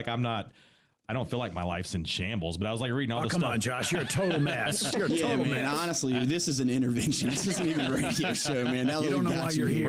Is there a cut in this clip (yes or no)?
no